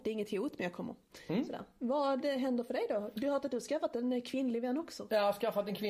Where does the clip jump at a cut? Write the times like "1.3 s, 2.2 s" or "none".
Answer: none